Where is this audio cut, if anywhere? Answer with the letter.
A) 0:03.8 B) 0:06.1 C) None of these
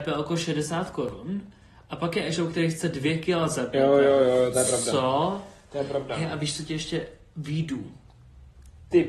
C